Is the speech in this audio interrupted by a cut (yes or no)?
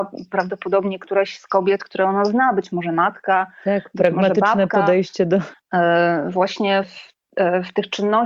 yes